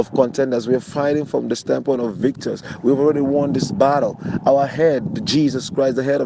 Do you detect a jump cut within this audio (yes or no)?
no